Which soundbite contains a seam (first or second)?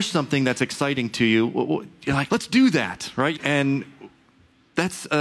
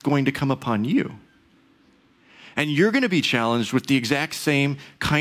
first